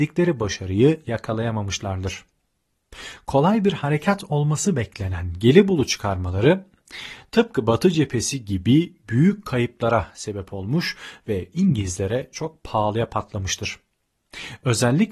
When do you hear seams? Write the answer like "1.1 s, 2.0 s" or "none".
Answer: none